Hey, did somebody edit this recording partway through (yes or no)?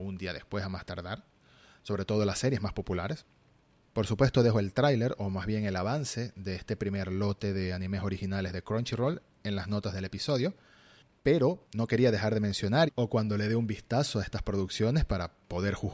yes